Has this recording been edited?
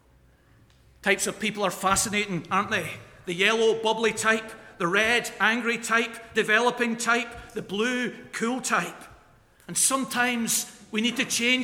yes; 1 cut; at 6.3 s

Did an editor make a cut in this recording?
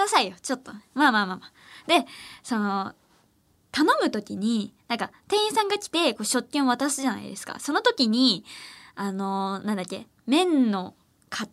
no; 0 cuts

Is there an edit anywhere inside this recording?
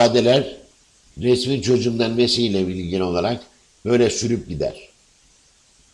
no; 0 cuts

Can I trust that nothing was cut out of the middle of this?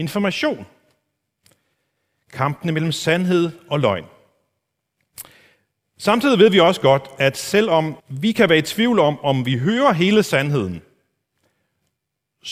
no; 1 cut; at 8.0 s

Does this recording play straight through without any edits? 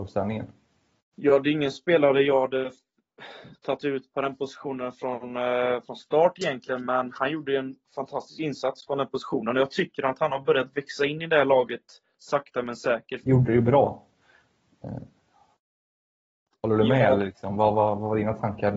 no; 1 cut; at 13.2 s

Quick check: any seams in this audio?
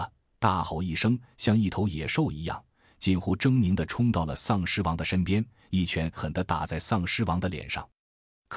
yes; 1 cut; at 6.2 s

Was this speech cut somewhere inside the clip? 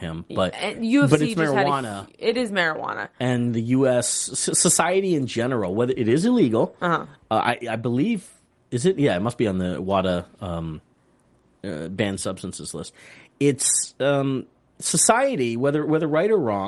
no; 0 cuts

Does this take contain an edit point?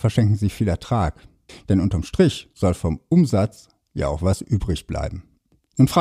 yes; 1 cut; at 1.5 s

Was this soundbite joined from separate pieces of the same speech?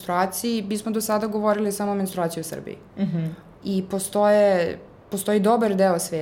yes; 1 cut; at 3.6 s

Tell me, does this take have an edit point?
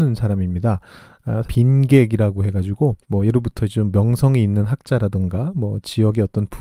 yes; 2 cuts; at 1.4 s, 3.0 s

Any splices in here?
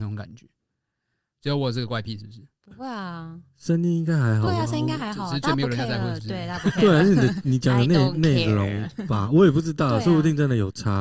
no; 0 cuts

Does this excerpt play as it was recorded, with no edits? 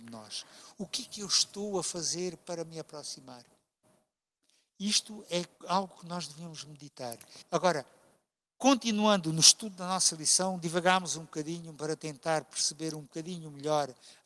no; 1 cut; at 7.4 s

